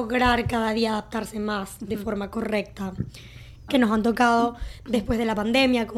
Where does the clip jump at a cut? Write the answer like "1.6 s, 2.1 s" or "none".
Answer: 3.7 s